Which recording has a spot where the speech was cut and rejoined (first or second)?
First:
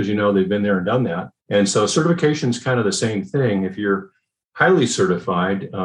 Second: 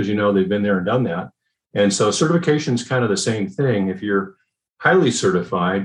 first